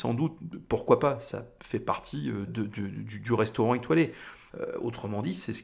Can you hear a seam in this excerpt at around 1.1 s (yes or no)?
no